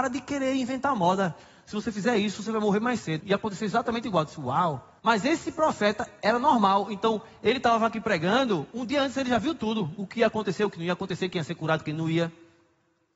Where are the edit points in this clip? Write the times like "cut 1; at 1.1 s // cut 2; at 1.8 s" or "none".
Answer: cut 1; at 3.2 s // cut 2; at 5.0 s